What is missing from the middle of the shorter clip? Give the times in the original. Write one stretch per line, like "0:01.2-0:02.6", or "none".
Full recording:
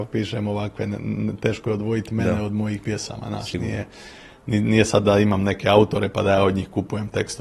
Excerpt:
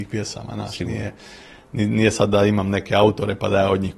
none

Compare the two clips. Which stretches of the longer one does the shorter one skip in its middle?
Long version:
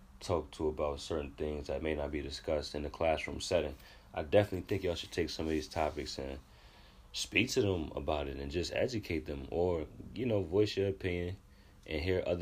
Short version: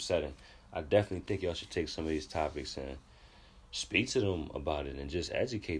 none

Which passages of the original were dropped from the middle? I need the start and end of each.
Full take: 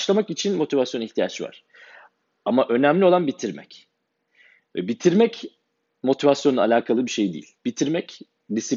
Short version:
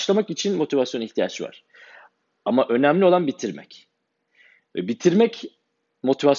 none

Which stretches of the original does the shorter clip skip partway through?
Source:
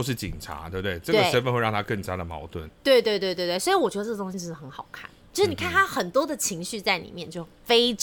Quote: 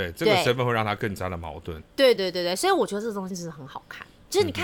0:03.0-0:03.2

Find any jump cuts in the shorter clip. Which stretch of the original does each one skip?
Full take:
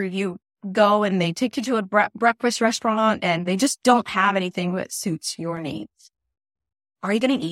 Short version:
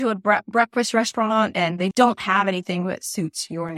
0:03.6-0:03.8

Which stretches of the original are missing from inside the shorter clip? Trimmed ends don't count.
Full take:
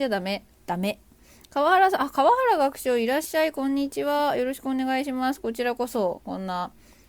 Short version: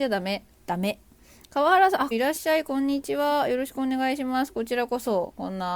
0:02.1-0:03.0

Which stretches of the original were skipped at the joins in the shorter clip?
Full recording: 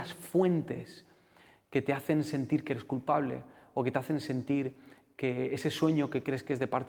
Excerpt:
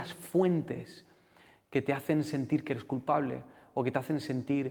none

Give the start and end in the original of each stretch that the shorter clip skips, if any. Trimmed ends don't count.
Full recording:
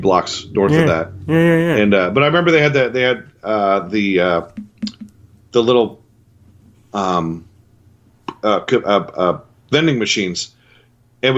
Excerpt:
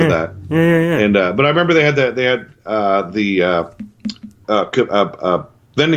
0:05.2-0:08.4

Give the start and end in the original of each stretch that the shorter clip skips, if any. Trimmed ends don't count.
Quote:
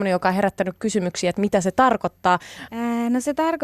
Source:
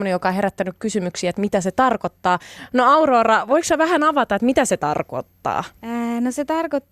0:02.7-0:05.8

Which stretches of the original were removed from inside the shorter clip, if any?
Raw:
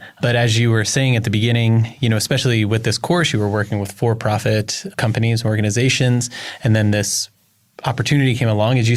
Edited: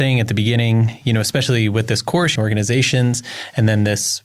0:03.3-0:05.4

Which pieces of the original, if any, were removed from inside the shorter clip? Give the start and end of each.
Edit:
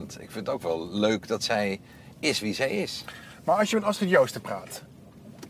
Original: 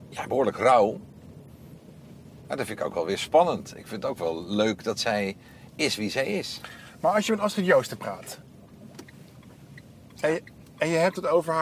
none

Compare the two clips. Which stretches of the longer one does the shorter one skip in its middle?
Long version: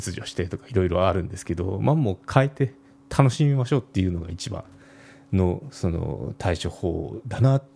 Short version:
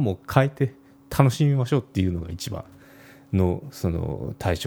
none

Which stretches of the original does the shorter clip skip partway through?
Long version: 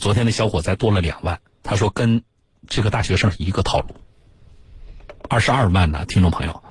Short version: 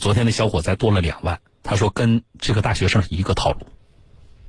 0:02.3-0:02.6

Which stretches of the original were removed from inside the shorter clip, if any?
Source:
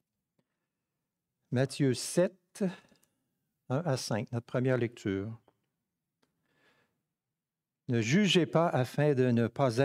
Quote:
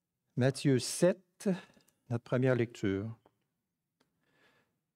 0:03.2-0:04.3

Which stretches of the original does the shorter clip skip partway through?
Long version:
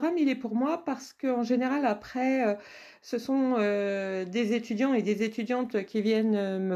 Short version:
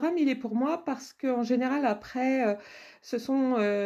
none

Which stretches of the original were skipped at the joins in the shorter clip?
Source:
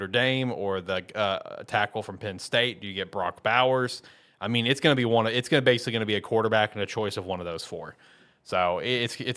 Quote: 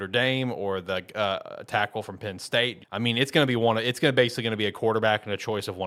0:02.8-0:04.3

